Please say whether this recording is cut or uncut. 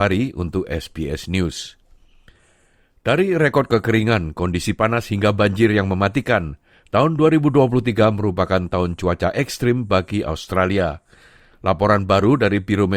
uncut